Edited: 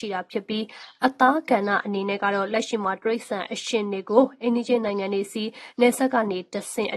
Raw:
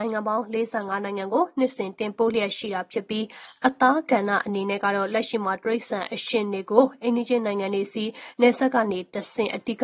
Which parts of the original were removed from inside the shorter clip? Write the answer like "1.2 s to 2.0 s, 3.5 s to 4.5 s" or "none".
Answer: none